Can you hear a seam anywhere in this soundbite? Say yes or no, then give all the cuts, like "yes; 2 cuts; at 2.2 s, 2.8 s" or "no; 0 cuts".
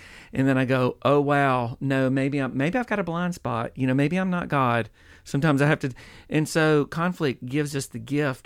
no; 0 cuts